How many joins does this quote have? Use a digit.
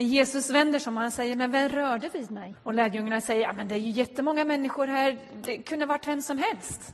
1